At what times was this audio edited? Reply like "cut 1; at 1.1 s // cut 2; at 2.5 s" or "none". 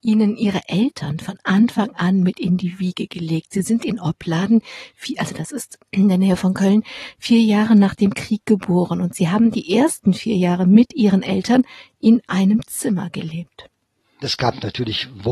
cut 1; at 14.2 s